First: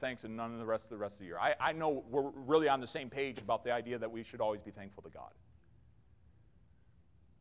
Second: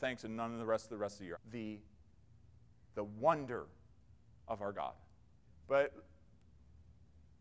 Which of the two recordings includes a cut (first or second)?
second